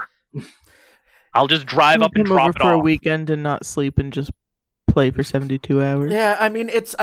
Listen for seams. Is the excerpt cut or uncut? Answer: uncut